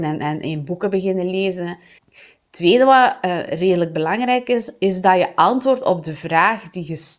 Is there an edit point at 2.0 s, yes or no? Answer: yes